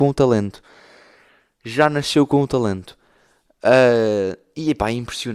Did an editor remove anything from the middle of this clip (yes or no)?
no